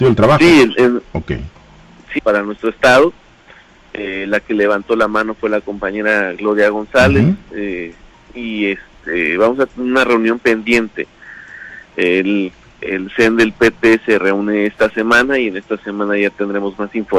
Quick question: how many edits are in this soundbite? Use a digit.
1